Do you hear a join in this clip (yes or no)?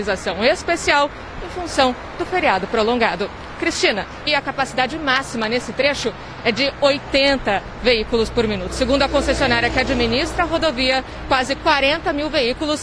yes